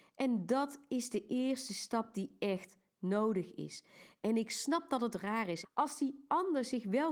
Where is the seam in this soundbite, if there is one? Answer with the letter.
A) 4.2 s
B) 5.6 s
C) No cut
B